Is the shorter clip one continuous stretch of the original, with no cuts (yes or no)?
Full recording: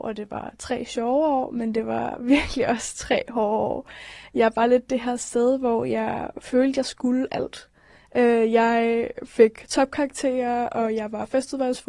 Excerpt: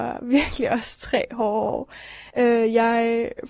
no